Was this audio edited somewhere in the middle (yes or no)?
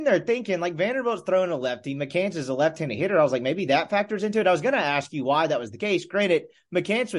no